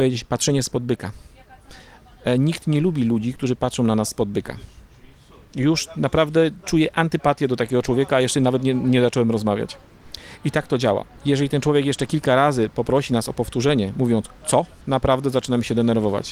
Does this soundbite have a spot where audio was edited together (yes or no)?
no